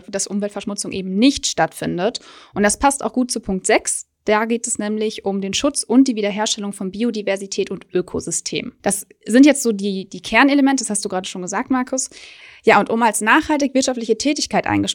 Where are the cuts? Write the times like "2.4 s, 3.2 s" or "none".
none